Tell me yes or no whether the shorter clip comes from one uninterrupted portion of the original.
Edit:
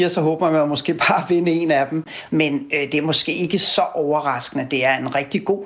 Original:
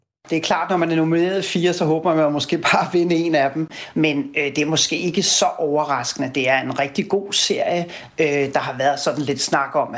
yes